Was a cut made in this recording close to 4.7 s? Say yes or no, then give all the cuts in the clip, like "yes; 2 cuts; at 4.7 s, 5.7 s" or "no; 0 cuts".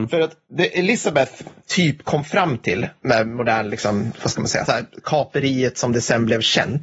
yes; 1 cut; at 4.7 s